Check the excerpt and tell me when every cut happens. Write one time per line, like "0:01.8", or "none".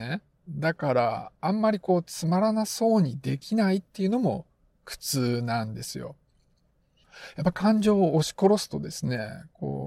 none